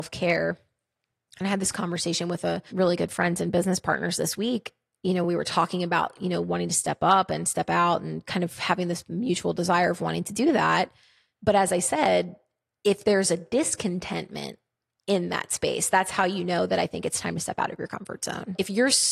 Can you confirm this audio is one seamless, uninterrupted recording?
yes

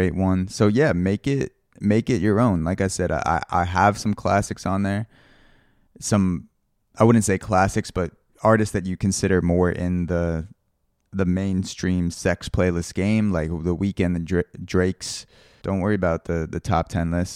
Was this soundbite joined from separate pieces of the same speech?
yes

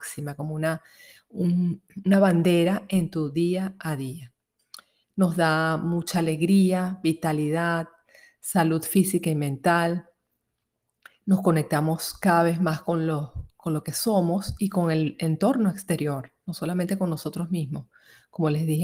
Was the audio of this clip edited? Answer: yes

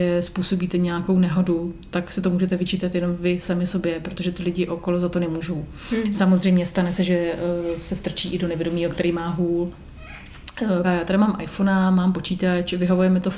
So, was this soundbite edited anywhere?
yes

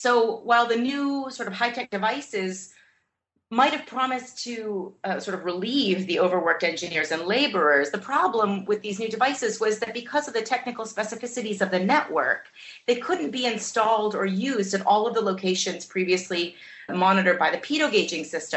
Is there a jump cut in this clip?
yes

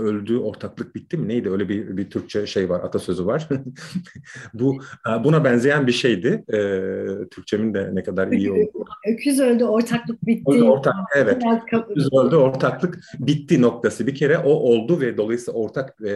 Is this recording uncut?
yes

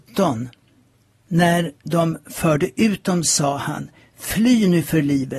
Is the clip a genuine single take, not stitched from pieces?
yes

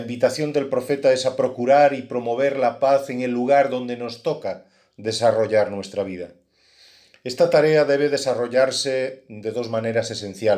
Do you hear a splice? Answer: no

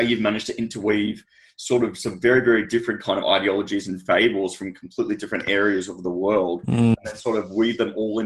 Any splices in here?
no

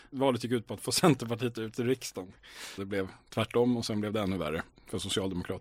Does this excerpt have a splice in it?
yes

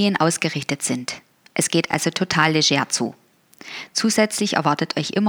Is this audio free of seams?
yes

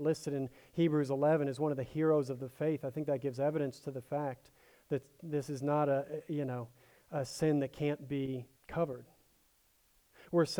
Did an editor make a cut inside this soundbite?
yes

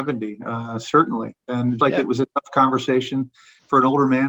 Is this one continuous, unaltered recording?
no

